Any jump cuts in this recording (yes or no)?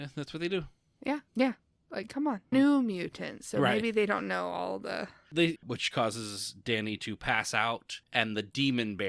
yes